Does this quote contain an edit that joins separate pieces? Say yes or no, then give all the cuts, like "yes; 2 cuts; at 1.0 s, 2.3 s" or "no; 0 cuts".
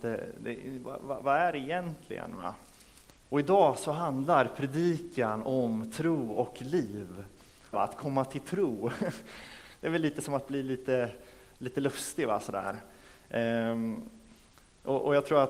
yes; 2 cuts; at 3.2 s, 7.7 s